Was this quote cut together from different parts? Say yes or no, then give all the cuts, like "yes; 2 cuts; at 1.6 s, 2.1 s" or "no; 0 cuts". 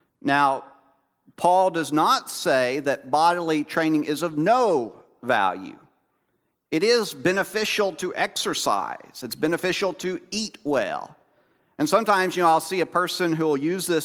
no; 0 cuts